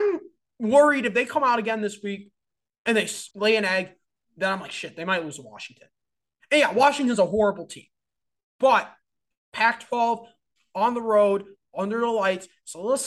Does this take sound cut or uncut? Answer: uncut